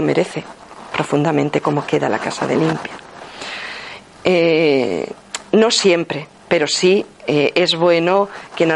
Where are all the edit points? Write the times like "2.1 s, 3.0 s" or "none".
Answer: 4.1 s